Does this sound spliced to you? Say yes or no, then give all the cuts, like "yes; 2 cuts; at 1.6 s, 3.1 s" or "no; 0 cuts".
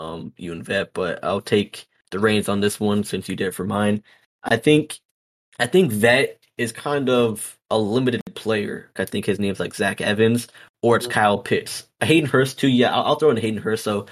yes; 3 cuts; at 5.4 s, 7.6 s, 9.0 s